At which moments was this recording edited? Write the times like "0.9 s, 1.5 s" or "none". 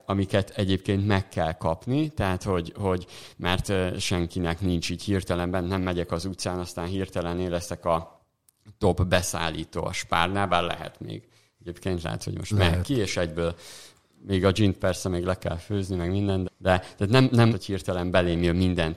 16.4 s, 17.5 s